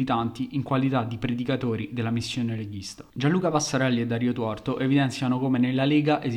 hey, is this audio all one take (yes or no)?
yes